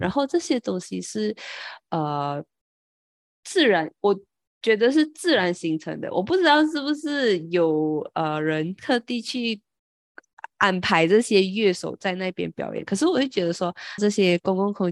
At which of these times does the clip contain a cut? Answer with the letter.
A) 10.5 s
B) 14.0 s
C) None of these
B